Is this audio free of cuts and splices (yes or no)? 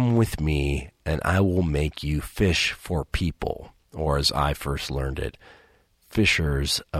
yes